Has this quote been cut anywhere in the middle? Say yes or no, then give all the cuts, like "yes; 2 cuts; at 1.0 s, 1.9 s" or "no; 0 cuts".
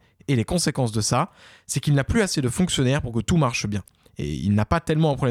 no; 0 cuts